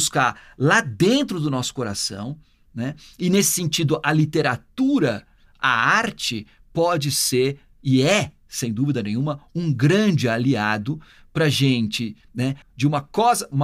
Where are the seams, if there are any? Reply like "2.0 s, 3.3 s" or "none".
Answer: 12.6 s